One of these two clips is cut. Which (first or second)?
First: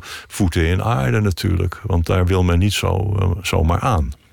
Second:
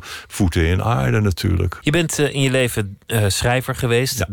second